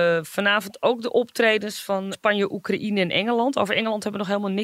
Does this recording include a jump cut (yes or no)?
yes